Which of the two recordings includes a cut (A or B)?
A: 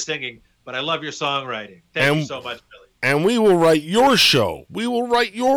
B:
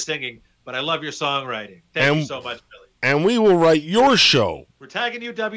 B